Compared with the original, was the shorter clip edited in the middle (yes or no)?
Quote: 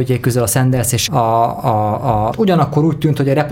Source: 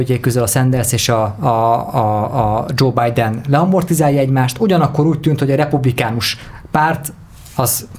yes